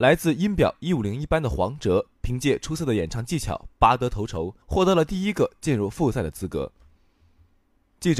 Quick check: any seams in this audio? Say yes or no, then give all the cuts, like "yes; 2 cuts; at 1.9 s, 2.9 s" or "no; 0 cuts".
yes; 1 cut; at 4.6 s